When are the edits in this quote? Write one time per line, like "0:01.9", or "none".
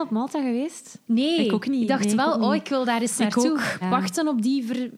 0:03.8